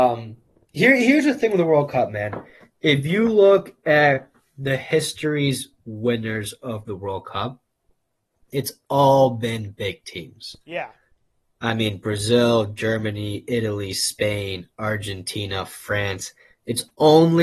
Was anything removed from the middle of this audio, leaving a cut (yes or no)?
no